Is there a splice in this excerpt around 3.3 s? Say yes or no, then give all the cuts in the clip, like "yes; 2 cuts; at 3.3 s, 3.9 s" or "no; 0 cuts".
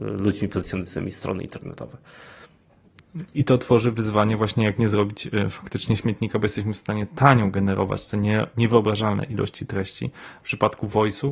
yes; 2 cuts; at 3.3 s, 10.4 s